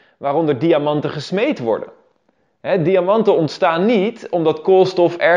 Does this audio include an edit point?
no; 0 cuts

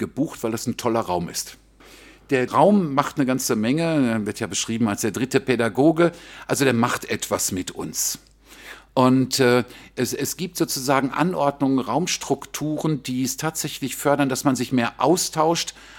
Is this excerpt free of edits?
no; 1 cut; at 2.5 s

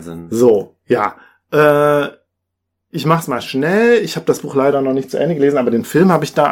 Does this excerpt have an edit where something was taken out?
no; 0 cuts

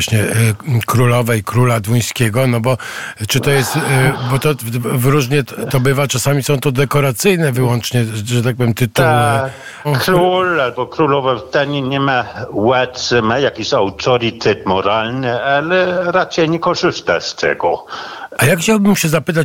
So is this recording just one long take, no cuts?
no; 2 cuts; at 9.8 s, 18.3 s

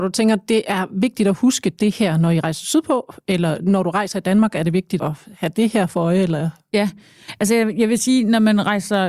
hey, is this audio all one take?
no; 1 cut; at 5.0 s

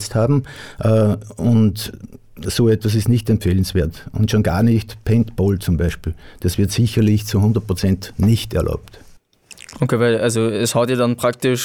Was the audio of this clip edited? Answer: no; 0 cuts

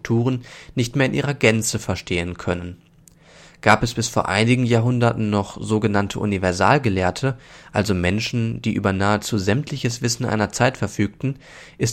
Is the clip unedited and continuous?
yes; 0 cuts

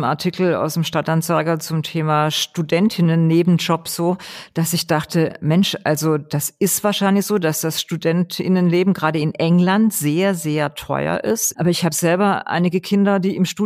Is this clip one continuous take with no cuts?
no; 1 cut; at 11.5 s

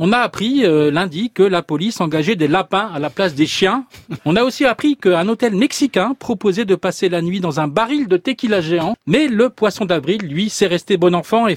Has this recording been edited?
yes; 2 cuts; at 4.2 s, 8.9 s

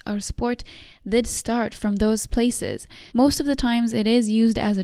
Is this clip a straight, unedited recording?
no; 1 cut; at 3.1 s

